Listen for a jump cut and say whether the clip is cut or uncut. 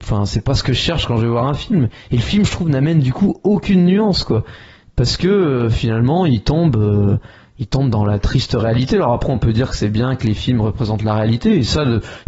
uncut